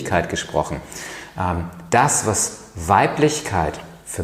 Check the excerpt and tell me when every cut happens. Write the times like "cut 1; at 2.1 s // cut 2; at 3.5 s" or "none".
none